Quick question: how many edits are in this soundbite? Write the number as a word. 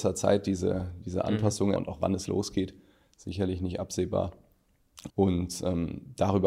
two